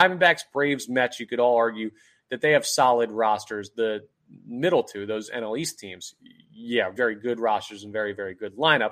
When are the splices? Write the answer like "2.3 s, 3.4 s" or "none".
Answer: 7.0 s